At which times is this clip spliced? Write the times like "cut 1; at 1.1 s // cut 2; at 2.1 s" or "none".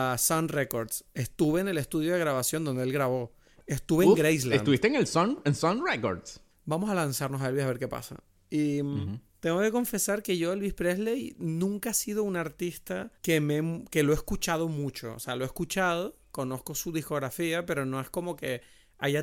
cut 1; at 6.5 s // cut 2; at 9.3 s // cut 3; at 13.2 s